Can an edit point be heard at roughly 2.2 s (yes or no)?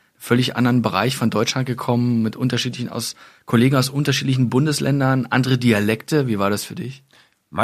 no